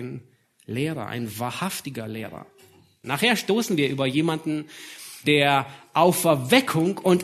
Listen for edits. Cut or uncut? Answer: cut